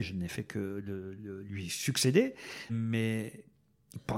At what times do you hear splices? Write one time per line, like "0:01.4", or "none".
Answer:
0:01.2
0:02.7